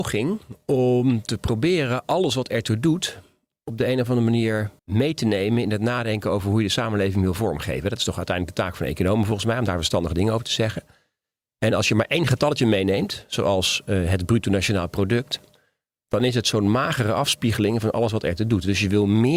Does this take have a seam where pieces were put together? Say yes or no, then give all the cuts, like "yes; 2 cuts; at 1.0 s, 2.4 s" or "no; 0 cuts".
yes; 1 cut; at 4.8 s